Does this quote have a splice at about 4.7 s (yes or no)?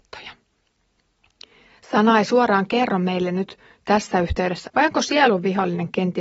yes